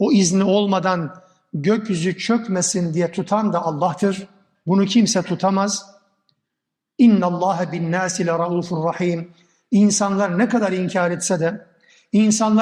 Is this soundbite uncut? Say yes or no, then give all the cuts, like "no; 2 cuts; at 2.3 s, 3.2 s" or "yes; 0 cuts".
no; 1 cut; at 4.5 s